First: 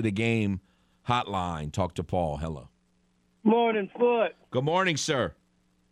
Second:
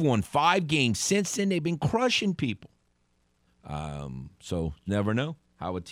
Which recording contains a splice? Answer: second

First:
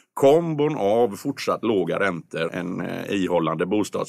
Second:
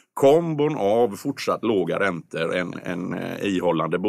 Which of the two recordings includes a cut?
first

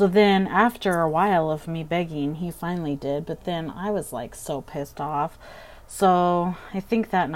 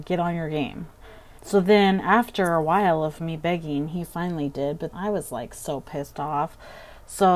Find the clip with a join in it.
second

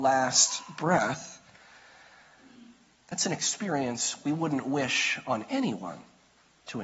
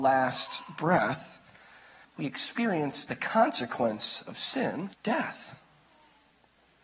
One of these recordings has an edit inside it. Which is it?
second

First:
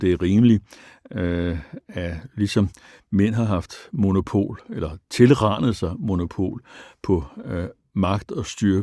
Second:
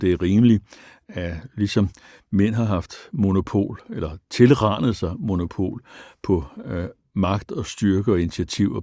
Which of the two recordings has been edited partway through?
second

